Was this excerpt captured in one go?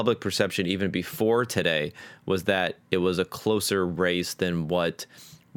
yes; 0 cuts

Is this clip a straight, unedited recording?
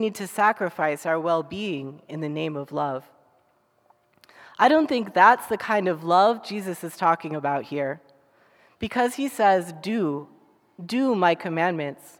yes; 0 cuts

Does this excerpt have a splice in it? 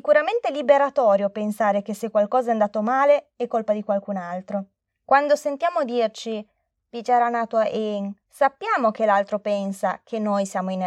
yes; 2 cuts; at 4.9 s, 8.2 s

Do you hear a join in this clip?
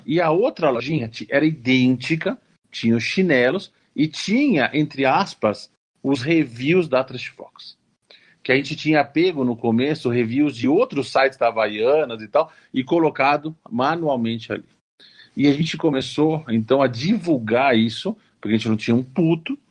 no; 0 cuts

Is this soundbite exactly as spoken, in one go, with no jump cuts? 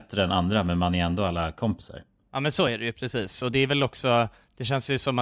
yes; 0 cuts

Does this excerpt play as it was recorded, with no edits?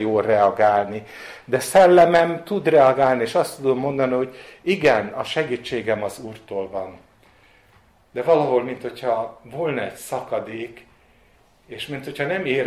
yes; 0 cuts

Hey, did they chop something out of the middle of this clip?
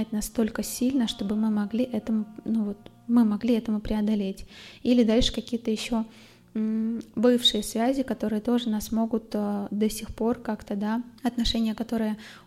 yes; 1 cut; at 11.2 s

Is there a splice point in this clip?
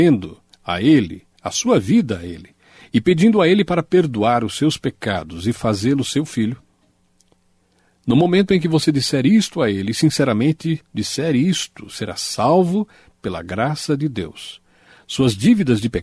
no; 0 cuts

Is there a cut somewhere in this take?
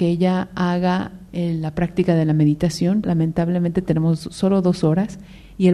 yes; 1 cut; at 3.0 s

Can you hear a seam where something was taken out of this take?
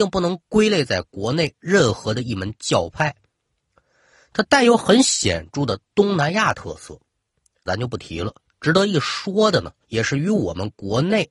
yes; 2 cuts; at 7.7 s, 9.8 s

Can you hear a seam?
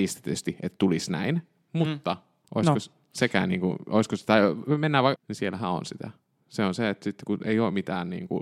yes; 2 cuts; at 2.4 s, 5.2 s

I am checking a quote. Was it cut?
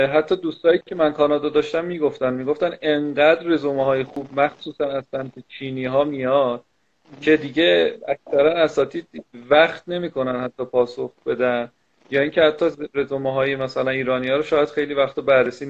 no; 0 cuts

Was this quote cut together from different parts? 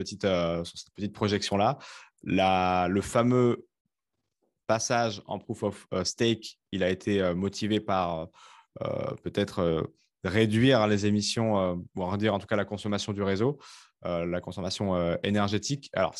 no; 0 cuts

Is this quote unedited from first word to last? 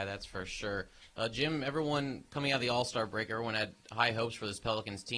yes; 0 cuts

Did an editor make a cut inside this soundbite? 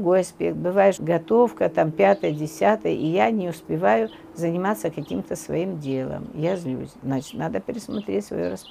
yes; 1 cut; at 1.0 s

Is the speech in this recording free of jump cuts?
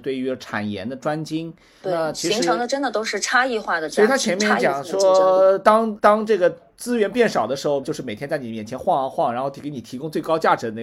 no; 3 cuts; at 1.8 s, 6.0 s, 7.8 s

